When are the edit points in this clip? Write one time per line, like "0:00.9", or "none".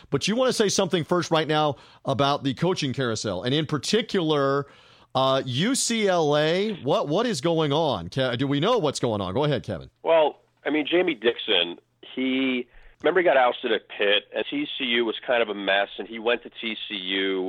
0:10.0
0:12.9
0:14.4